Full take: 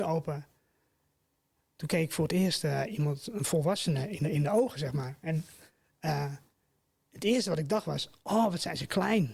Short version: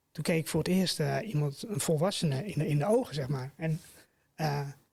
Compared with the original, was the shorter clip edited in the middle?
no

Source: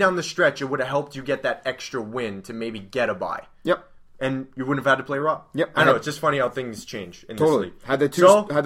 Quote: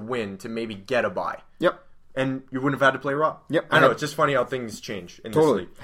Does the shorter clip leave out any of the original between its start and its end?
no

